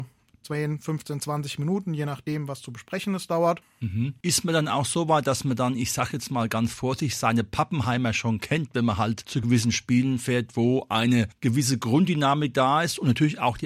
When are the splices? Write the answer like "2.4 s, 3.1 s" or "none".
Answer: 3.6 s